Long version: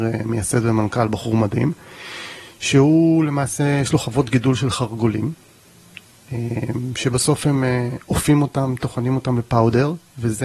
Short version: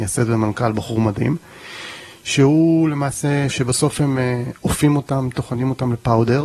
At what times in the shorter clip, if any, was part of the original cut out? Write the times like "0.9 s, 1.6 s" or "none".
3.5 s